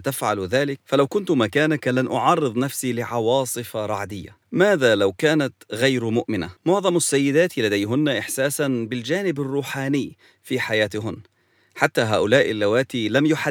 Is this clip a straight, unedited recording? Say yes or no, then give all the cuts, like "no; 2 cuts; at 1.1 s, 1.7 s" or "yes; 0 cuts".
no; 2 cuts; at 4.4 s, 6.6 s